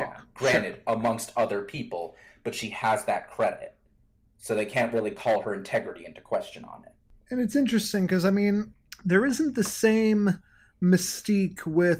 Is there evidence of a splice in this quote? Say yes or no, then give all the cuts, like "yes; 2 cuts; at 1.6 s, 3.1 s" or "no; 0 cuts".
no; 0 cuts